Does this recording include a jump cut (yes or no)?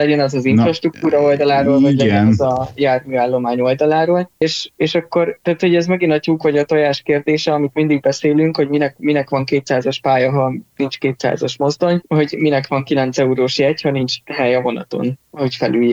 no